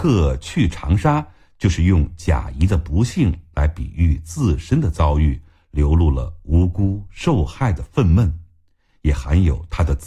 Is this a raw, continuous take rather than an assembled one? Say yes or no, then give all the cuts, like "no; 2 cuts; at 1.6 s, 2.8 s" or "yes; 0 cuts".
yes; 0 cuts